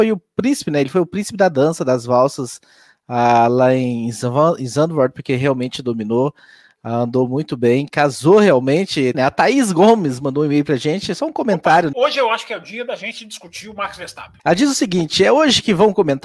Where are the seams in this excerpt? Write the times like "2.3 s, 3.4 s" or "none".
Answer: 9.1 s, 11.9 s, 14.4 s